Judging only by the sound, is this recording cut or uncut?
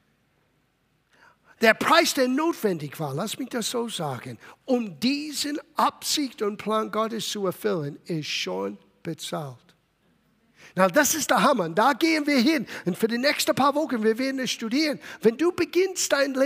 uncut